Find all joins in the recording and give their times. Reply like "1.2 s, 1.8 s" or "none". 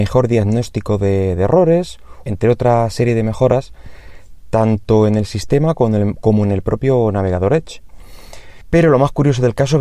2.2 s